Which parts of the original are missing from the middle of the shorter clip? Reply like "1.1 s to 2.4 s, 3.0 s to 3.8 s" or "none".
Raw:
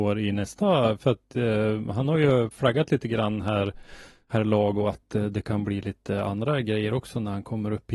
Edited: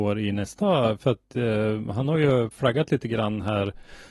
none